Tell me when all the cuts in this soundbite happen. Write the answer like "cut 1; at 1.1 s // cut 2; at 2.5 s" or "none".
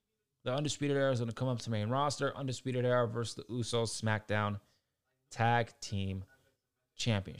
none